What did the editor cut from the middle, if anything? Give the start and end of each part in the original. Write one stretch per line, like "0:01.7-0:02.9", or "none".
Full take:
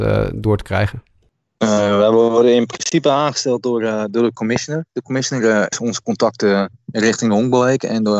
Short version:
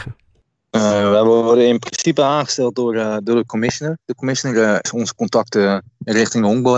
none